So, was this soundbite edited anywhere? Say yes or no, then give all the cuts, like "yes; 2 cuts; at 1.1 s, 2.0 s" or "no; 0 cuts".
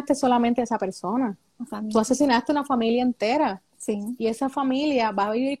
yes; 1 cut; at 1.5 s